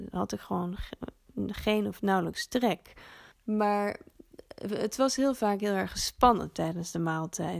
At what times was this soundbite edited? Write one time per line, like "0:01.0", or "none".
0:03.3